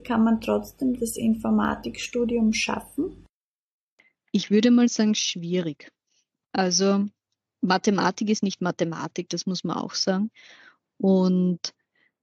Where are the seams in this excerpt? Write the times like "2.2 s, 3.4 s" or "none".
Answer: 7.5 s